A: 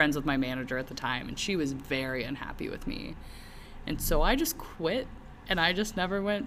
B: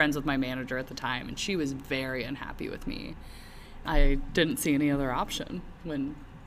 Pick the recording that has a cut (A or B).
B